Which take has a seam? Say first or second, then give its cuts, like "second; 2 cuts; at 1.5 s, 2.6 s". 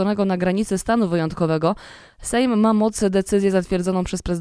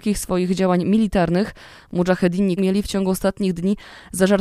second; 1 cut; at 2.6 s